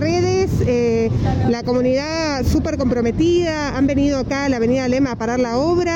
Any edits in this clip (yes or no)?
no